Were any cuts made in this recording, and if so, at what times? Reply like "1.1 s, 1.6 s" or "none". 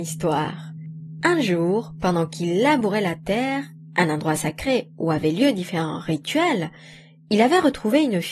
none